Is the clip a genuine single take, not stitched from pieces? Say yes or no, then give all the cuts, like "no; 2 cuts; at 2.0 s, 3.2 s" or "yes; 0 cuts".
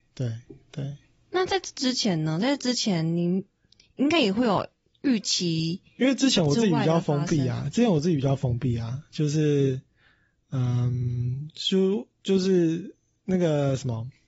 yes; 0 cuts